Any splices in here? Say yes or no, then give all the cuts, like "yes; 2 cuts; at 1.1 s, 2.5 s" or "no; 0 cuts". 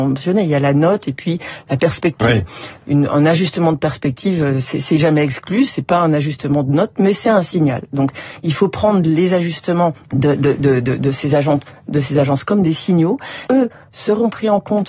yes; 2 cuts; at 10.0 s, 13.5 s